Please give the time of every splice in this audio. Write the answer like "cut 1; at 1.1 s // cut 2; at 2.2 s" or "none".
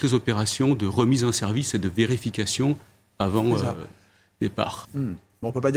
cut 1; at 4.8 s